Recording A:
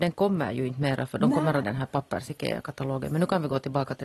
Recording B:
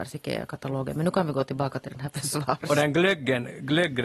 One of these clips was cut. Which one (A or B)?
A